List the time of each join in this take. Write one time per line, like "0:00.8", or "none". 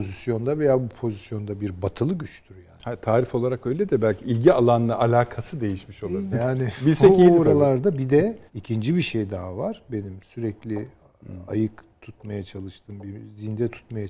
0:06.3
0:08.5